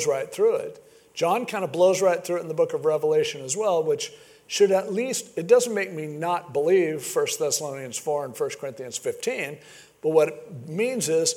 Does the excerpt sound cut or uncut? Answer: uncut